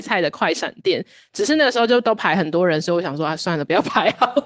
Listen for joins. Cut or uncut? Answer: uncut